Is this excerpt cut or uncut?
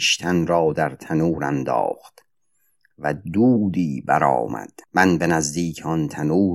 cut